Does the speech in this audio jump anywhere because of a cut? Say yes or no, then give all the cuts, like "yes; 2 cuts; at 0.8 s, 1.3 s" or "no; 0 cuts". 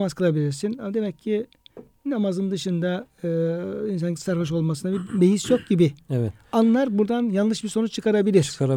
no; 0 cuts